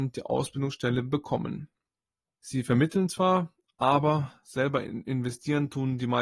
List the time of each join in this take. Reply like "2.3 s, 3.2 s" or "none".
2.4 s